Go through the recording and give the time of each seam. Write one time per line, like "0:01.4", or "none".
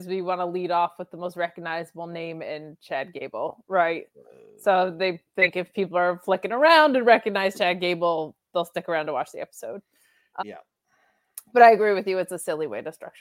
0:10.4